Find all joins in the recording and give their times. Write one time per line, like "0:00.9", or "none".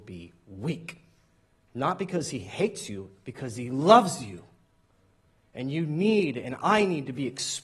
0:01.6